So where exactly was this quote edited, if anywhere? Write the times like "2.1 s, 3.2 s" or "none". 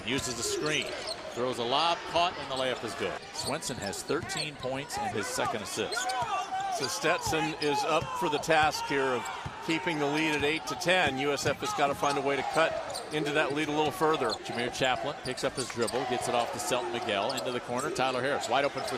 5.1 s